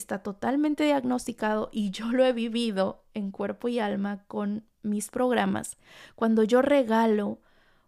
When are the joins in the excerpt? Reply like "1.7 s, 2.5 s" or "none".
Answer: none